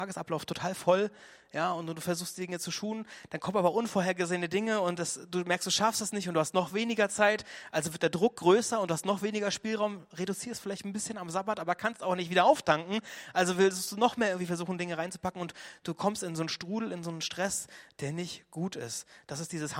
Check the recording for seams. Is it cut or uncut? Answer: uncut